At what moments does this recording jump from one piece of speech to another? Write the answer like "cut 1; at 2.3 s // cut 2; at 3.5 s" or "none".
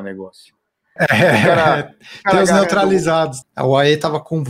cut 1; at 1.0 s // cut 2; at 3.4 s